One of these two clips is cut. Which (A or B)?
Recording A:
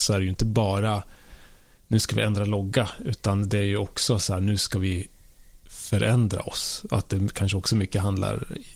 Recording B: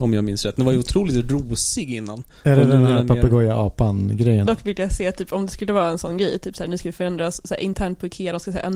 B